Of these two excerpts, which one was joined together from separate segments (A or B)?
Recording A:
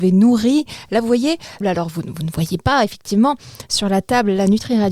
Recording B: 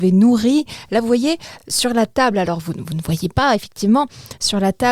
A